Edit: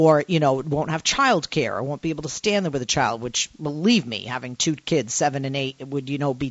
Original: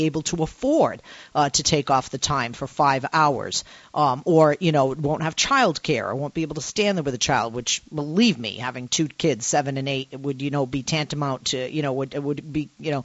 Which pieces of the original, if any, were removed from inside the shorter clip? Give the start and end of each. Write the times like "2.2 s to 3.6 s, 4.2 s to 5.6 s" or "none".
none